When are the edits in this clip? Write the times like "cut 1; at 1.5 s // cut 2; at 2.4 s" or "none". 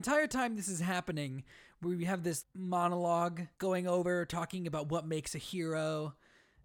cut 1; at 2.4 s // cut 2; at 3.5 s